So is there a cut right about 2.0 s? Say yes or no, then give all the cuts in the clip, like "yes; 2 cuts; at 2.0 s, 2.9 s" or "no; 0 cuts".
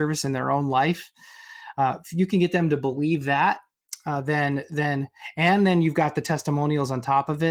no; 0 cuts